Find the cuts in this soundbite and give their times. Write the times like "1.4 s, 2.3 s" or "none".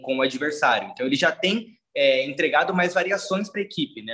none

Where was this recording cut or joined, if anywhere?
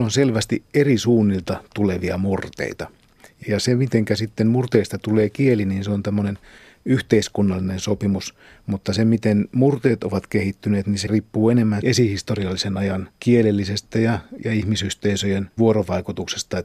none

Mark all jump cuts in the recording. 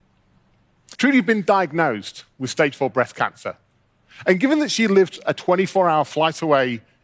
0.9 s

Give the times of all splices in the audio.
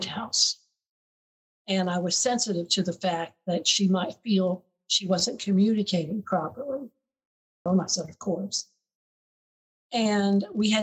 1.5 s, 7.7 s

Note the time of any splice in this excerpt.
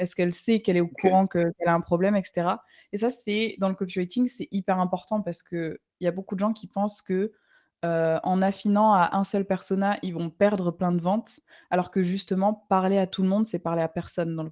none

